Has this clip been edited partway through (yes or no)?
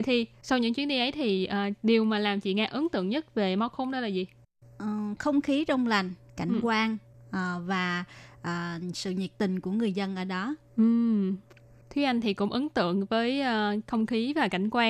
no